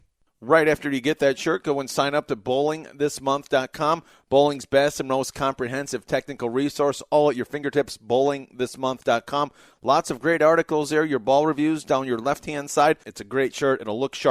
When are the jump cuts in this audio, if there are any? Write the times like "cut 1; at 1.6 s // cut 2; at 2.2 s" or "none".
cut 1; at 13.0 s